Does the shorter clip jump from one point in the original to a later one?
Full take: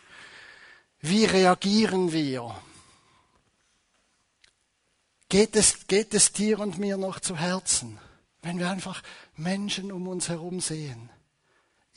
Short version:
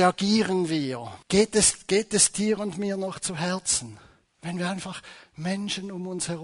yes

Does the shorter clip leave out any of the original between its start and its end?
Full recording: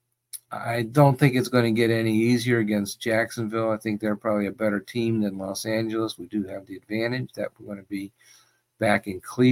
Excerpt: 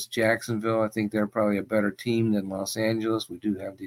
no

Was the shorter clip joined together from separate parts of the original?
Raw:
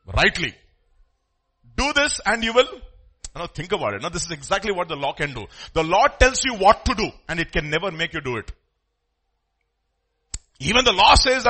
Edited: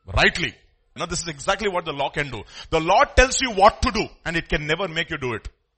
yes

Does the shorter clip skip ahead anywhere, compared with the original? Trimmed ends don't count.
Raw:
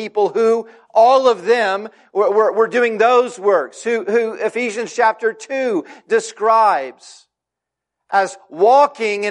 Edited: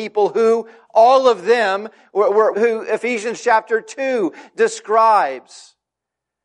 yes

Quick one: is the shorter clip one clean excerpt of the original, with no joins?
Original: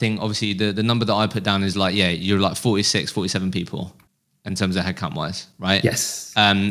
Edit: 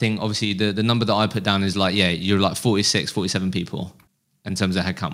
yes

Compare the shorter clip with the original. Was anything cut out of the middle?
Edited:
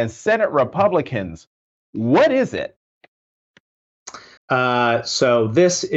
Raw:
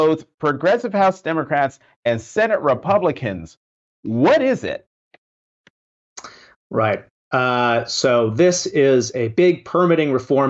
yes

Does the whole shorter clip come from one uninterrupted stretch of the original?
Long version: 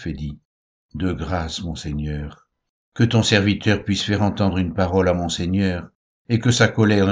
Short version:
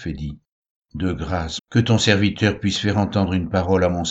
no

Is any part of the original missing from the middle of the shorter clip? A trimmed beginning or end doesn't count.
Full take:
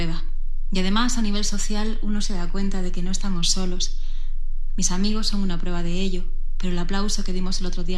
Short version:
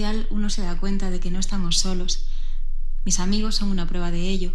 no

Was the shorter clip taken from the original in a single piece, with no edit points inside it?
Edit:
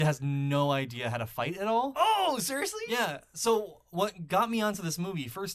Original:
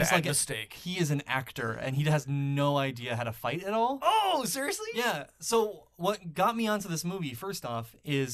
yes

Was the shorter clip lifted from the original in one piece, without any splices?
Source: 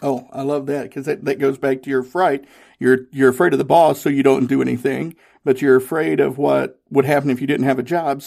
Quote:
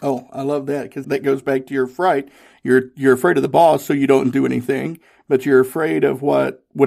no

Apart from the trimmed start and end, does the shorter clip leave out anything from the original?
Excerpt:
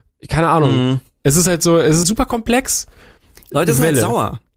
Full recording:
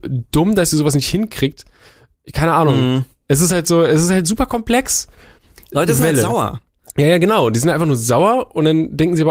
yes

